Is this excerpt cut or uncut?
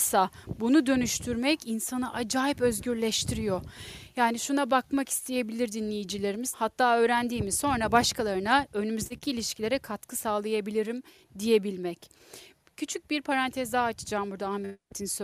cut